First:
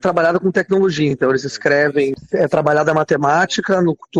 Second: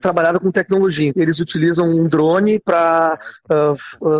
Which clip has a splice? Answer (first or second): second